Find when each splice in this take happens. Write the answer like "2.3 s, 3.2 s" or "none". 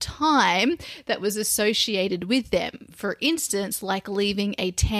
none